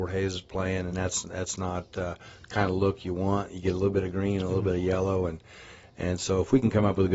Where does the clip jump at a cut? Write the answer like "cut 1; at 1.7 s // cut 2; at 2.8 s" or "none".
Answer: none